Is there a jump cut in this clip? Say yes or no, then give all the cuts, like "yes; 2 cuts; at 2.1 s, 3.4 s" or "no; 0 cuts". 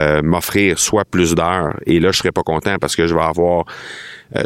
no; 0 cuts